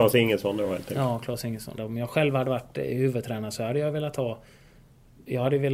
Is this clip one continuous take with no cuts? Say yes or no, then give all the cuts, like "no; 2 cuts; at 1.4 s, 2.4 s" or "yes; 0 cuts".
no; 1 cut; at 1.8 s